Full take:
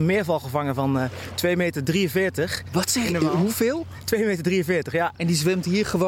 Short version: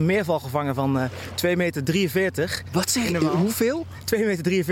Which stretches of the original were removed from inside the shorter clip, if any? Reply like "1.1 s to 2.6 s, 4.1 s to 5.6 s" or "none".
none